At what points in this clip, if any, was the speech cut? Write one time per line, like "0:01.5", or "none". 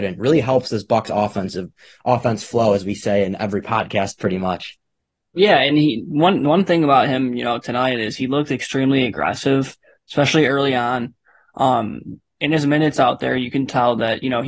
none